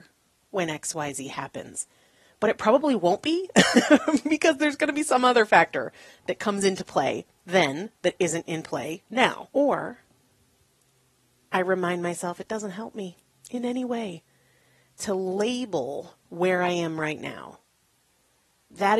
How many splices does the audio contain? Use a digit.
2